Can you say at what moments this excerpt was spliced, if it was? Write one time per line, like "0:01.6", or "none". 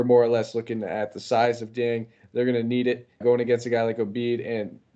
0:03.2